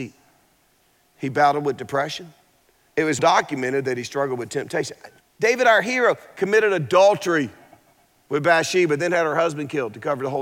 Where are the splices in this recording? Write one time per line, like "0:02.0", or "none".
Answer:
0:03.2
0:05.2